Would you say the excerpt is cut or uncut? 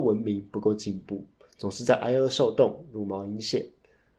uncut